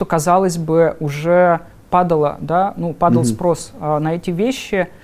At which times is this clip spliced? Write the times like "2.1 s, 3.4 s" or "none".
none